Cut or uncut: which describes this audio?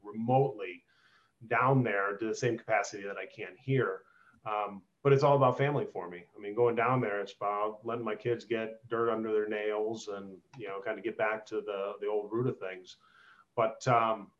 uncut